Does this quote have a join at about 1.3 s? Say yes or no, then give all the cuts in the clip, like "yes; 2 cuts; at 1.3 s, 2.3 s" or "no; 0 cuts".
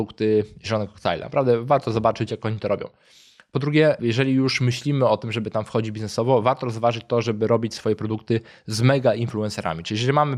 no; 0 cuts